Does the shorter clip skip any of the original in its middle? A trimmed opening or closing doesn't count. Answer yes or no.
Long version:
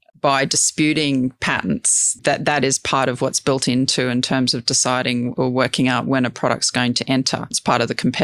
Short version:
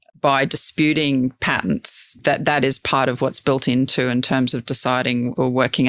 no